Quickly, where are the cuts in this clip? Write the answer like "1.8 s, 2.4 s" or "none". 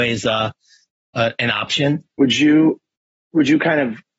2.1 s